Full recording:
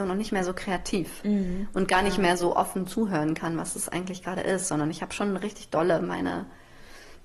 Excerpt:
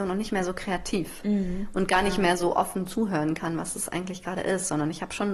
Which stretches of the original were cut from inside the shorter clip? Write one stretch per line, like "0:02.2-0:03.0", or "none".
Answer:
none